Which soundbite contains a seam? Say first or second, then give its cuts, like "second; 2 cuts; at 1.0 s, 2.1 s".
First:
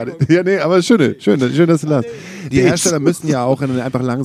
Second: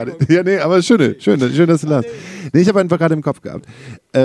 first; 1 cut; at 2.5 s